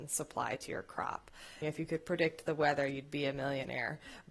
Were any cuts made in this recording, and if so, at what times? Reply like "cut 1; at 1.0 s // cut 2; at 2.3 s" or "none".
cut 1; at 1.6 s